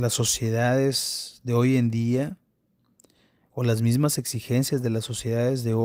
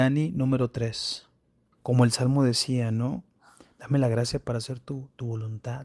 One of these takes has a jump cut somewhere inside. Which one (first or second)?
second